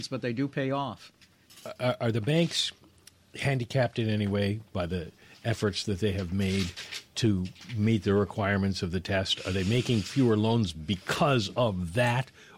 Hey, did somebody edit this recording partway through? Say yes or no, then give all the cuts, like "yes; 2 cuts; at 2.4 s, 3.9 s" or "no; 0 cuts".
no; 0 cuts